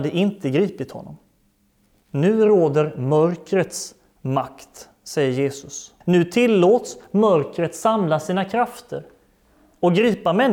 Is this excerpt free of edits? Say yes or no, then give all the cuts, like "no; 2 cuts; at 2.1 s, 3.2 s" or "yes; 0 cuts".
no; 2 cuts; at 1.9 s, 6.0 s